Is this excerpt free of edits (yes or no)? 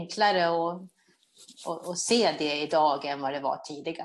yes